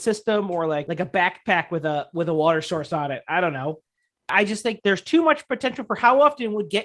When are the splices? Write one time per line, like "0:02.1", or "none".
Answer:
none

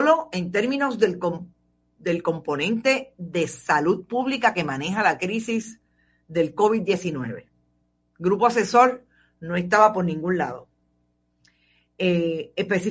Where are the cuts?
none

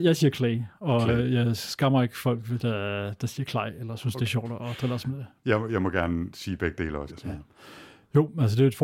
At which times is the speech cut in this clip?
0:07.1

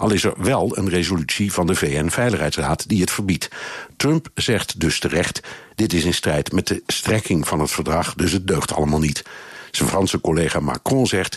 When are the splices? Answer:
none

